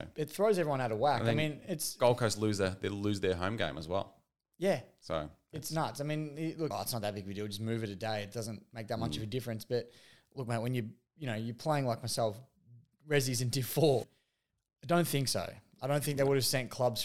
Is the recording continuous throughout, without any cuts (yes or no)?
no